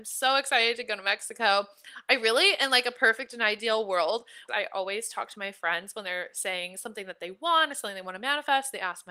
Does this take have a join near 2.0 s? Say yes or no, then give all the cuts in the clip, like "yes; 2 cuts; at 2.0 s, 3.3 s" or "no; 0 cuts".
no; 1 cut; at 4.5 s